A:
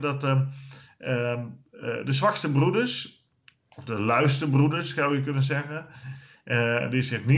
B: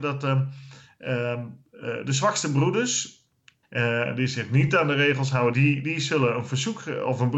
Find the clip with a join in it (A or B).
B